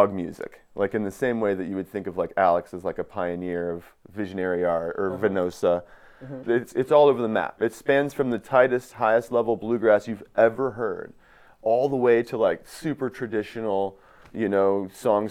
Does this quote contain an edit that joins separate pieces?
yes; 1 cut; at 6.4 s

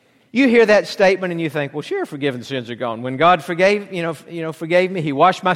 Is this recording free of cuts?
yes; 0 cuts

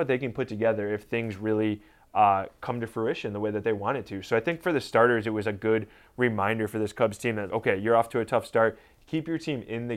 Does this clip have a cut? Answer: yes; 1 cut; at 7.5 s

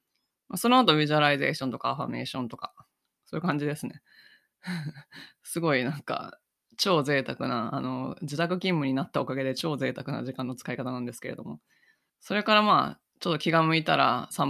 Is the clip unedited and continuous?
no; 1 cut; at 12.1 s

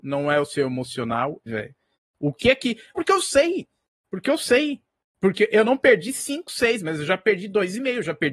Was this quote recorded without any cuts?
no; 2 cuts; at 1.5 s, 3.0 s

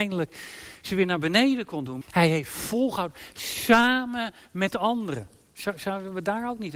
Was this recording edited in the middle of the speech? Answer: yes; 1 cut; at 2.0 s

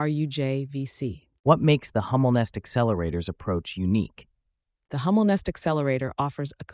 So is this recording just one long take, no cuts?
yes; 0 cuts

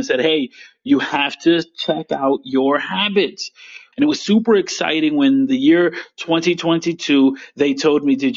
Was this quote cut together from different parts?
yes; 1 cut; at 3.9 s

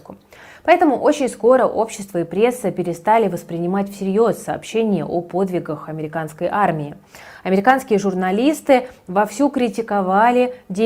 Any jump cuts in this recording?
no; 0 cuts

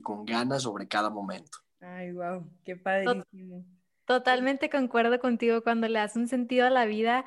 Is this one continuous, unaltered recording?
no; 1 cut; at 1.7 s

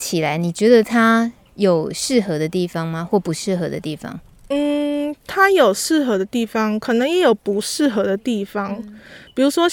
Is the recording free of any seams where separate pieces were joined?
yes; 0 cuts

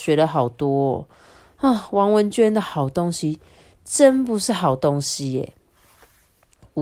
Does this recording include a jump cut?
no; 0 cuts

